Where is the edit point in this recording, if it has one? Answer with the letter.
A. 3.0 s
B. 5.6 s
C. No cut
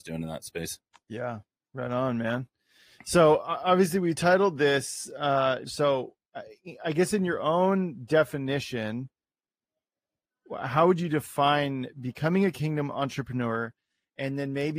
B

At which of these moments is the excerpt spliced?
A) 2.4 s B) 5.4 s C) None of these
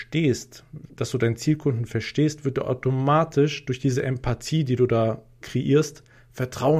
B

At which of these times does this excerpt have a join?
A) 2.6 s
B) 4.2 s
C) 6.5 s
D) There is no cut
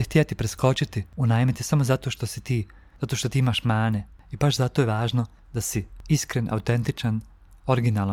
B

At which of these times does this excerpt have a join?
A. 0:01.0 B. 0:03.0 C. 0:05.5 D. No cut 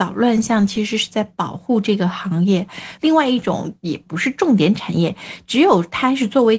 B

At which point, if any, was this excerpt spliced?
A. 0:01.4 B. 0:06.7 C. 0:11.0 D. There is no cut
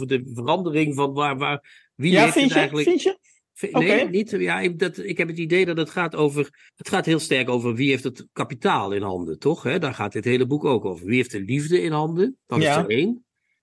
B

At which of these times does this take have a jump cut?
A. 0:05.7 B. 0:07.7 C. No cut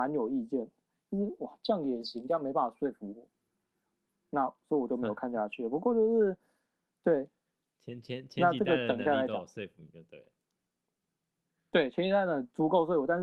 C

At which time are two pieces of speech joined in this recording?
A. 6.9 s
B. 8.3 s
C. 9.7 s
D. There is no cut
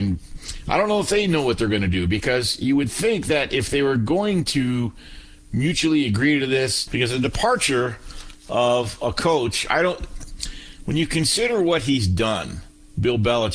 A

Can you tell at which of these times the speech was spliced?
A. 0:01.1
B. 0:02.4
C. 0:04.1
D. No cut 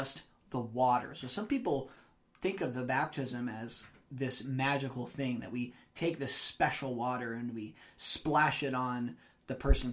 D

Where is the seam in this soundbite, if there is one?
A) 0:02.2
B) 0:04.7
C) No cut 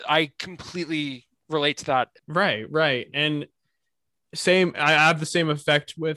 A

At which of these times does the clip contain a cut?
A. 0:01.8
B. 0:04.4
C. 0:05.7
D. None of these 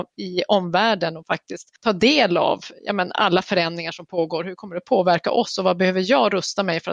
A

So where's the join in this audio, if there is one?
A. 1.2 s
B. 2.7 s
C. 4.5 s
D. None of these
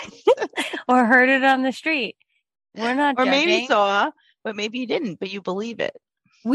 D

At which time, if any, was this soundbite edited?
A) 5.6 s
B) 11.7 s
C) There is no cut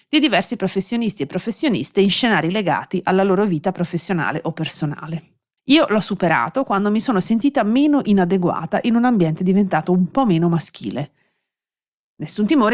A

